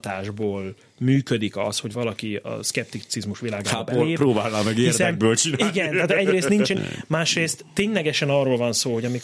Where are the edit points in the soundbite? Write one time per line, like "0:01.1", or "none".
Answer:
0:01.9
0:06.7